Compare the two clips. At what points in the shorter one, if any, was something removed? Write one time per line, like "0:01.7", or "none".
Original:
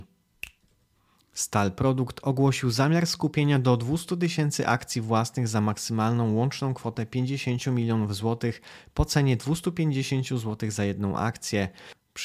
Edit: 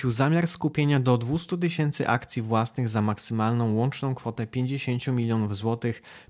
none